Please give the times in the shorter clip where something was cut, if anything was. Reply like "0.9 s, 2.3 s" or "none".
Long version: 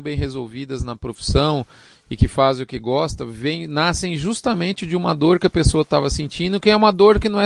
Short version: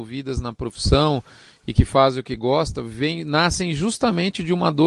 none